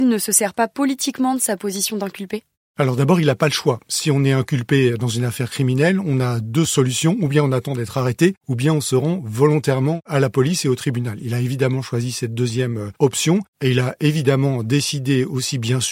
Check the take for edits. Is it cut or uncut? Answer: uncut